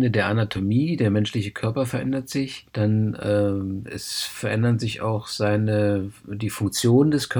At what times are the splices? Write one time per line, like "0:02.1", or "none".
0:02.7